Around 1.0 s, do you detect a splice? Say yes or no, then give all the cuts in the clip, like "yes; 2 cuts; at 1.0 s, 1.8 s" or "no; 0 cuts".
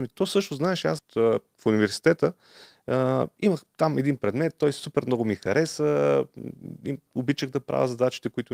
yes; 2 cuts; at 1.0 s, 7.1 s